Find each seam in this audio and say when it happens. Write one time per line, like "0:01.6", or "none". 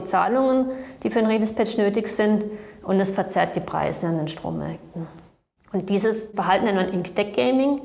0:05.6